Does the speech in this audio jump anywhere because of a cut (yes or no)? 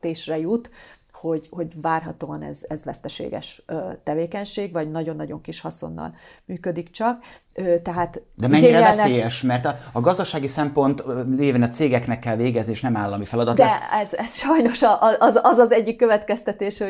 no